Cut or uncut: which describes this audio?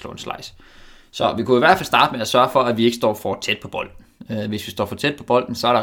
uncut